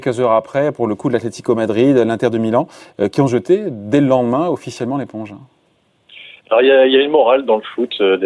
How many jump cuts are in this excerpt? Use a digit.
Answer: 0